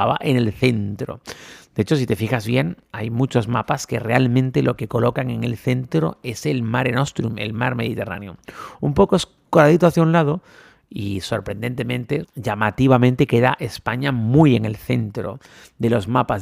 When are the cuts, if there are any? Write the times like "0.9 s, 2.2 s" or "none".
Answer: 12.2 s